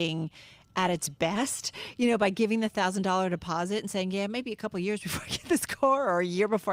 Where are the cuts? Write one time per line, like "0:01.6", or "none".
none